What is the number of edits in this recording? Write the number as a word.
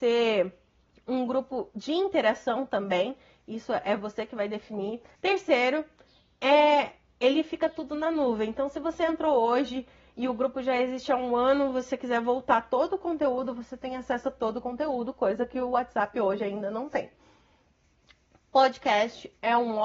one